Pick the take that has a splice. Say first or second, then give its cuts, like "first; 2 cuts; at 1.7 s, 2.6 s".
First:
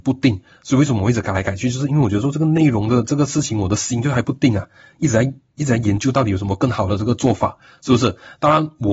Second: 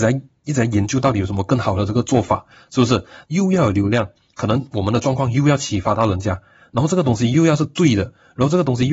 second; 1 cut; at 3.2 s